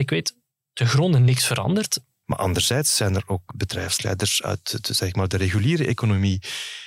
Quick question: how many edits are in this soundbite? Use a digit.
2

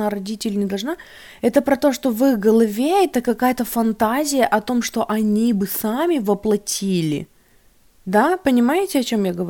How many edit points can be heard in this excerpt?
0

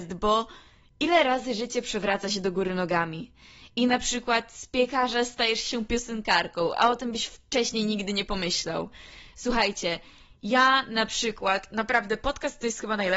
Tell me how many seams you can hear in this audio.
0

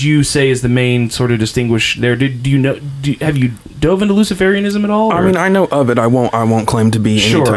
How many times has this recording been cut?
0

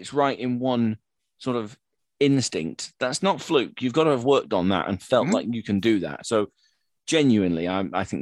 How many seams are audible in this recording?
0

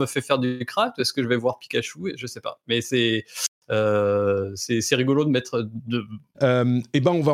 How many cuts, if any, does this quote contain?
1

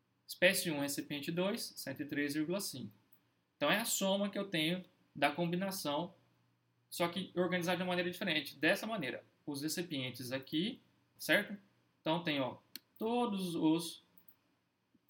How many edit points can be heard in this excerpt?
1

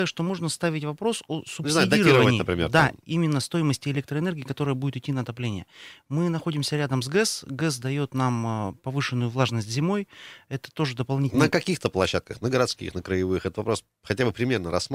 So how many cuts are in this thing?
0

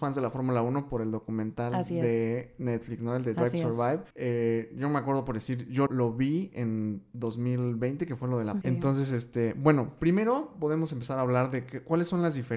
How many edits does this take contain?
3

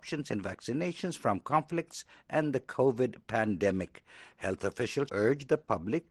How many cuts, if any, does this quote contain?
1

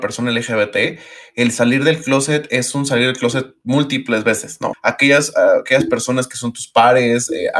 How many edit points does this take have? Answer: 1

